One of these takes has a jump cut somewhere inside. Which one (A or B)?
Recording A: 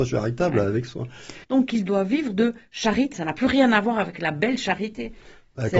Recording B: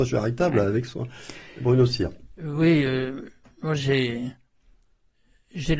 A